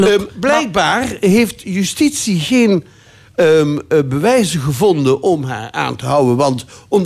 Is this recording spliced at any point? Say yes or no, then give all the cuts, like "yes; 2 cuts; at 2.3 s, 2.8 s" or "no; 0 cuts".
no; 0 cuts